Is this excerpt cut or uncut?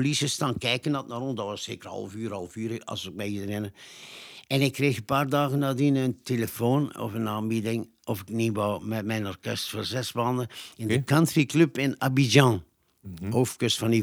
uncut